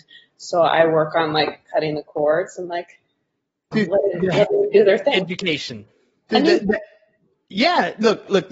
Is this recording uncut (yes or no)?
no